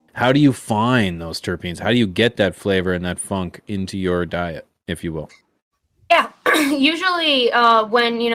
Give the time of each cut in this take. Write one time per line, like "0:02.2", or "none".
none